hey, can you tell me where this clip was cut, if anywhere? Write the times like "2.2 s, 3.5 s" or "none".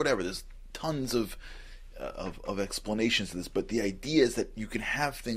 none